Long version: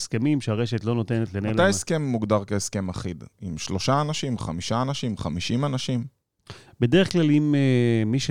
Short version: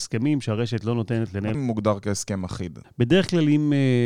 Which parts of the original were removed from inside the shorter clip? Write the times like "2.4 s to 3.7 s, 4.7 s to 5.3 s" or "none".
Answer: 1.5 s to 2.0 s, 3.3 s to 6.7 s